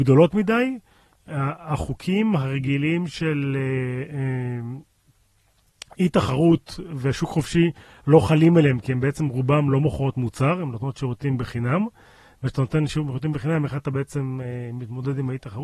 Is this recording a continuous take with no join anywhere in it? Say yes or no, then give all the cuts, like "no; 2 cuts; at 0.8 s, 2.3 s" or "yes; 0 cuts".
yes; 0 cuts